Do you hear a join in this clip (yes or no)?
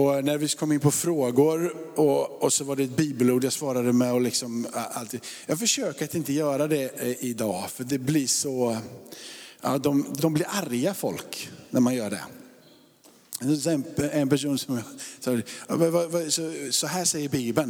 yes